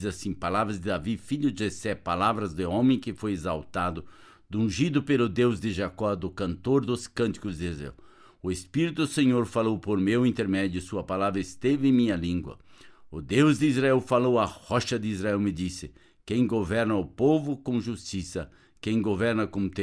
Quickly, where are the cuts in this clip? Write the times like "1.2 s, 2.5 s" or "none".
none